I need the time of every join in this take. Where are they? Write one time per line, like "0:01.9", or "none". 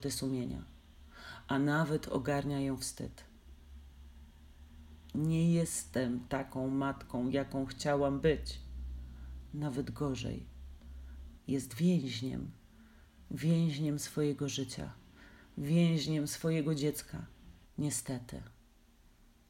0:11.4
0:17.6